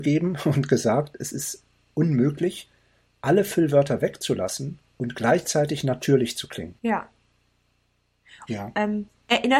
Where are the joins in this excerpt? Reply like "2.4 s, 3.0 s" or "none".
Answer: 6.8 s, 8.5 s